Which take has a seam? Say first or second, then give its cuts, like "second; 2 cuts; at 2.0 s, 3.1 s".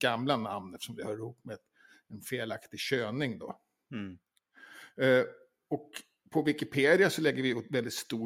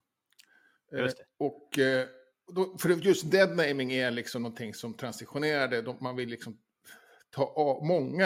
second; 1 cut; at 1.3 s